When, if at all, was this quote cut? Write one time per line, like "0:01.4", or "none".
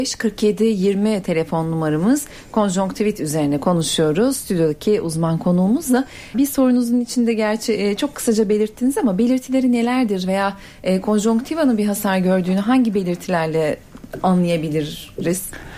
0:06.3